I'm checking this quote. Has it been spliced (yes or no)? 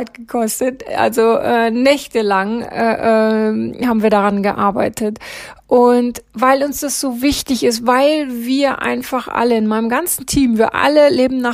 no